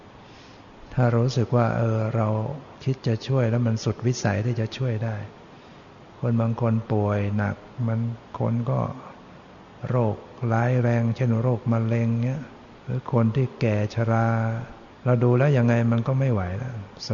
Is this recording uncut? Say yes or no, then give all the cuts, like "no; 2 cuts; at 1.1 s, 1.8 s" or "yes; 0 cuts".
no; 2 cuts; at 12.8 s, 14.9 s